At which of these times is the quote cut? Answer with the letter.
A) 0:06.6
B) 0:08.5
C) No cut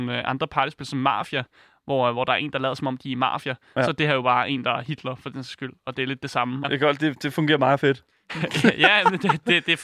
A